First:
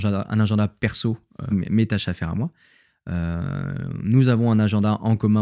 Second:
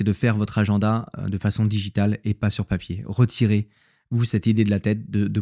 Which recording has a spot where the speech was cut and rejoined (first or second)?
first